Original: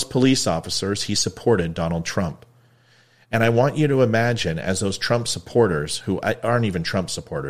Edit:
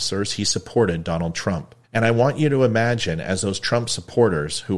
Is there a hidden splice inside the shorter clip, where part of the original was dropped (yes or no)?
yes